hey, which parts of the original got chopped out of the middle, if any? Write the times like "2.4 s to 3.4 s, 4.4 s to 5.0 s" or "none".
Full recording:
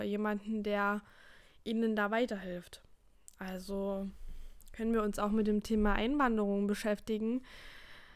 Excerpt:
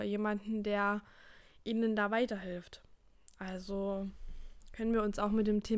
none